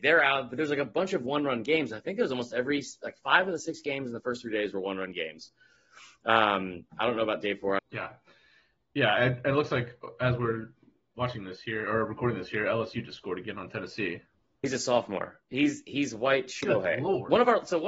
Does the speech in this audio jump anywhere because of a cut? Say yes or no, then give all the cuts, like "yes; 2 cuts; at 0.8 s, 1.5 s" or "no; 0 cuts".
yes; 2 cuts; at 7.8 s, 14.6 s